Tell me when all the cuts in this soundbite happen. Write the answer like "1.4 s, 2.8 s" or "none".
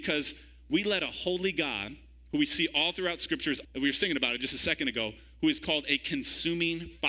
3.6 s